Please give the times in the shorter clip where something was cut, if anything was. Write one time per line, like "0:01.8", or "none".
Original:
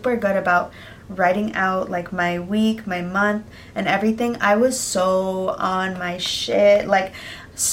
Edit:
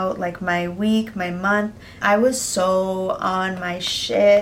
0:02.0